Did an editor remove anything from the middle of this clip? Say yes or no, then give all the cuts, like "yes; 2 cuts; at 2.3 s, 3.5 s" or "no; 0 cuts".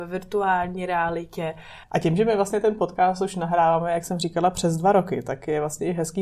yes; 1 cut; at 1.8 s